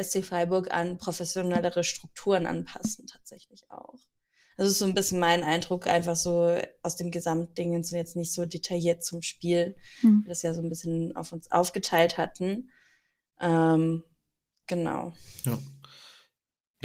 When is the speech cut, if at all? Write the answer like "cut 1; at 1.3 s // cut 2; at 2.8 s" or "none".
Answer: none